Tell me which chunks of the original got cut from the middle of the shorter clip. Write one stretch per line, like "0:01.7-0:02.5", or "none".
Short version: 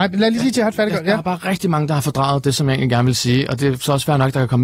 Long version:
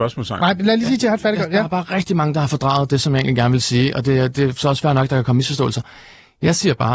0:04.0-0:04.3